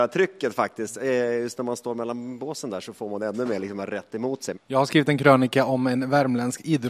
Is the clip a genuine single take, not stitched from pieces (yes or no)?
no